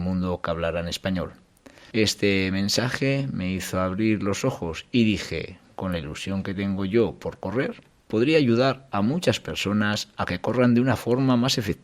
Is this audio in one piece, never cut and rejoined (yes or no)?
no